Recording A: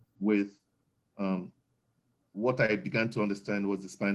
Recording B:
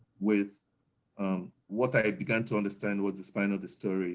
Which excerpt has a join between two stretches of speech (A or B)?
B